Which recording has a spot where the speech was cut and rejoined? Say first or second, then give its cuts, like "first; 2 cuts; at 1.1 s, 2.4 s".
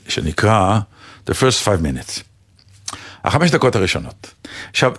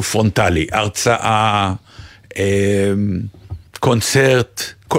second; 1 cut; at 3.7 s